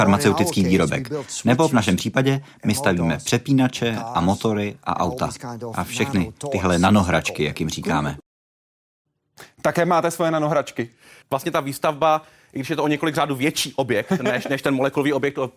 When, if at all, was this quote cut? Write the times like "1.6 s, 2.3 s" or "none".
11.2 s